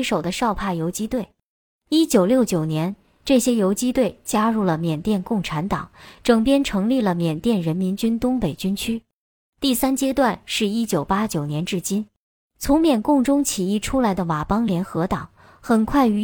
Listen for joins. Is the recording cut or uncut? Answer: cut